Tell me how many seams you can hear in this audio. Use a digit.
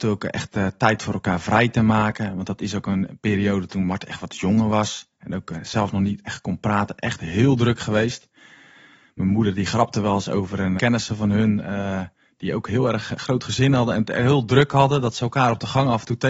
1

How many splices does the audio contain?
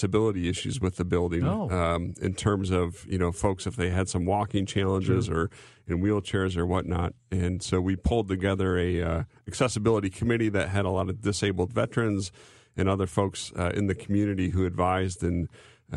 0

